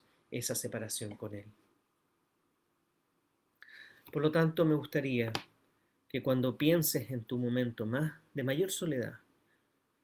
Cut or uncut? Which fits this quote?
uncut